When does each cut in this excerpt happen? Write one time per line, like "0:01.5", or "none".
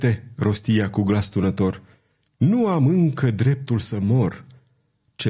none